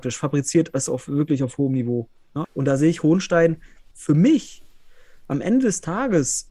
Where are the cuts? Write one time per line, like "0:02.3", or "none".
0:02.4
0:03.9